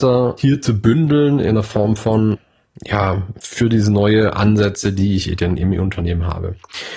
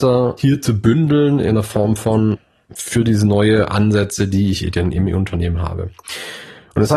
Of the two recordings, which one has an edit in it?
second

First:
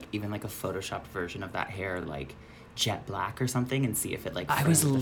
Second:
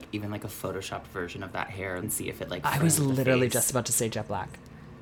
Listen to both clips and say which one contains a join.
second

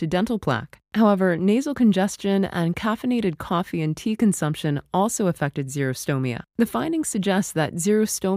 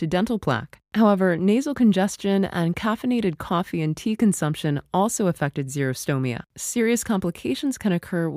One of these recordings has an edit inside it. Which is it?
second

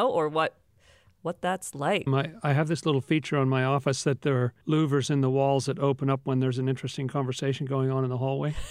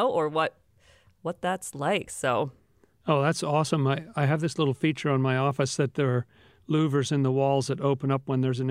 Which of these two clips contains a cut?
first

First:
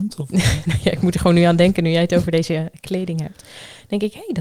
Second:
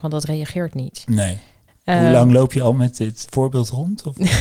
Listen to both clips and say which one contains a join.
second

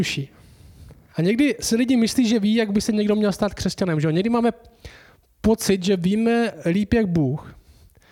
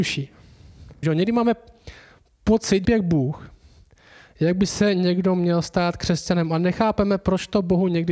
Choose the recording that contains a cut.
second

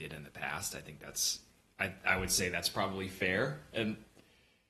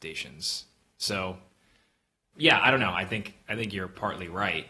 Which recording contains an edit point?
second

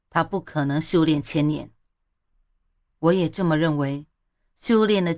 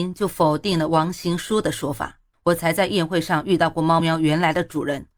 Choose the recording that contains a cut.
second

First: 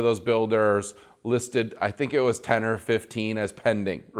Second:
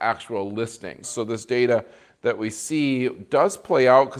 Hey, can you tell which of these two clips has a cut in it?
second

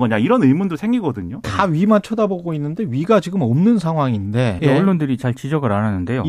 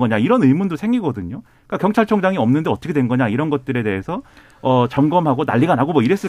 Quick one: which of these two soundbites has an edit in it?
first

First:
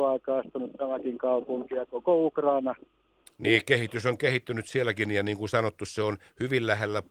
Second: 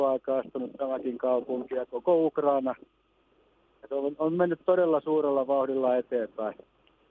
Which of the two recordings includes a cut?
first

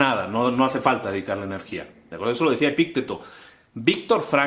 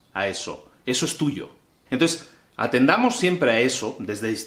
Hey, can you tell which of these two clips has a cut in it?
second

